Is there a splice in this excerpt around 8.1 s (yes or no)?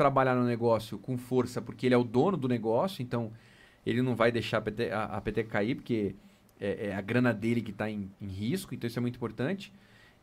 yes